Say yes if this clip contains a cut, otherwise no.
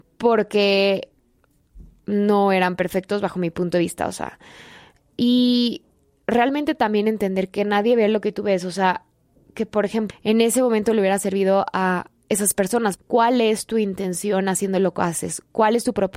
yes